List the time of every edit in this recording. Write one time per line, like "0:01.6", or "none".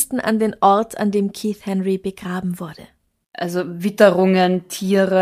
0:03.2

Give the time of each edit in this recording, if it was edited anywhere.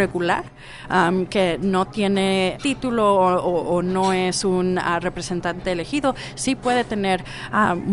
0:02.5

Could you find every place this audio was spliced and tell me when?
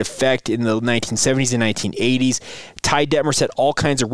none

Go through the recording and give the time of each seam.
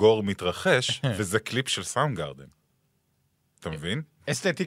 none

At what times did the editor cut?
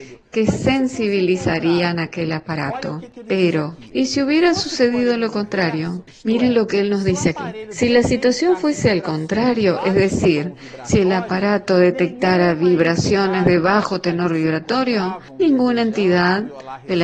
none

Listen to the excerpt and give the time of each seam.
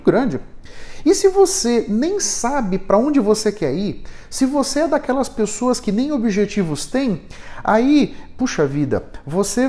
none

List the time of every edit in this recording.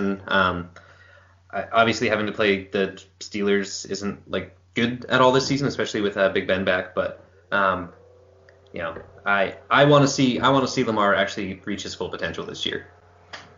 none

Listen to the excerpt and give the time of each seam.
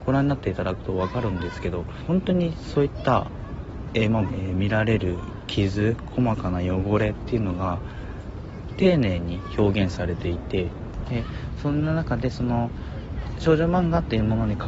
0:04.3
0:11.1

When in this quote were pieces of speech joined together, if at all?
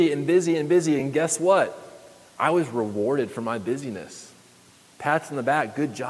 none

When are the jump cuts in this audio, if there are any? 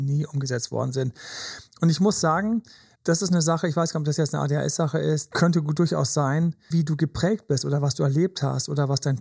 0:02.9
0:05.3
0:06.7

